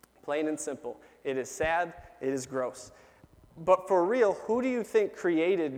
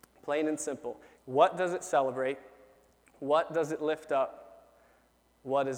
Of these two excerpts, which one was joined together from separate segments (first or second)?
second